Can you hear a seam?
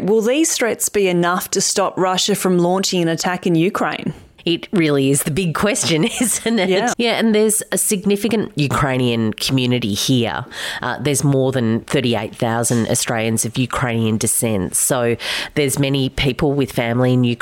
yes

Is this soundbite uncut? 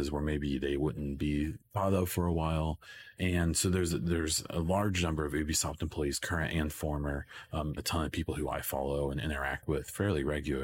no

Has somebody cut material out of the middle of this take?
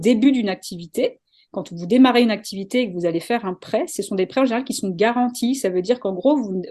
no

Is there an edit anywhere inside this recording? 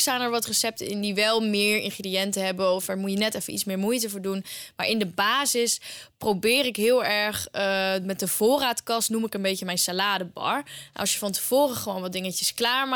no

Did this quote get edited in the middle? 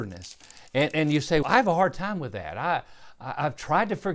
yes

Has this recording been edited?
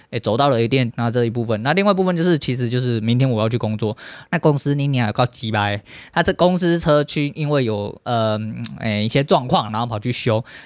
yes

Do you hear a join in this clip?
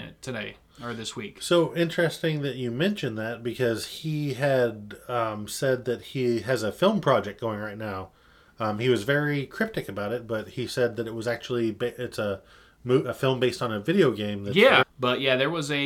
yes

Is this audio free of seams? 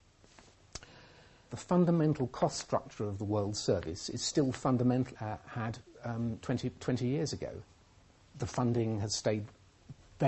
no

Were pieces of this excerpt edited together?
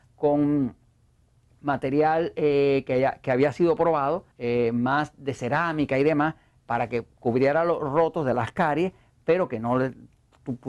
yes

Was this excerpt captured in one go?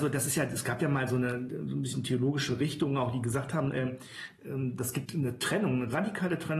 no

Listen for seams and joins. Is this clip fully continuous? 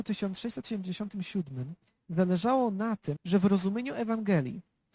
no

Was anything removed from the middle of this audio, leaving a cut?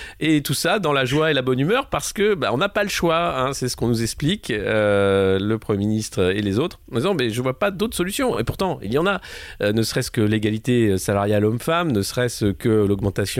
no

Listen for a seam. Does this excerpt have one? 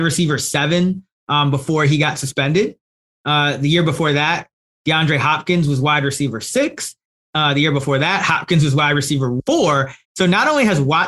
yes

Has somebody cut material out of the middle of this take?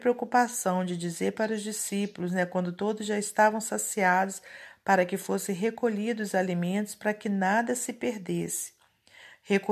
no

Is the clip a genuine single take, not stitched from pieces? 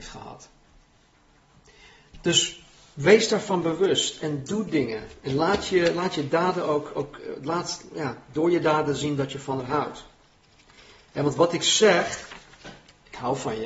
yes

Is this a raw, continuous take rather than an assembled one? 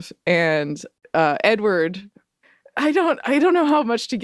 yes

